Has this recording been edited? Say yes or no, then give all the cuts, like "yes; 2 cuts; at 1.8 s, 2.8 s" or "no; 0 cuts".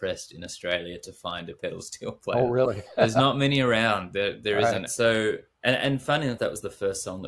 yes; 2 cuts; at 4.9 s, 6.4 s